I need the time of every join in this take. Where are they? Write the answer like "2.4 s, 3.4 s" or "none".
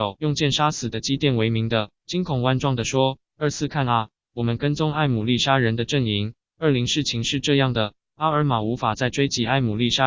2.0 s, 6.5 s